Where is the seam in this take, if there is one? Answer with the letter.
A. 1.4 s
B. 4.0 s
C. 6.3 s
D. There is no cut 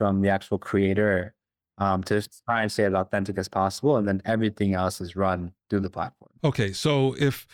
D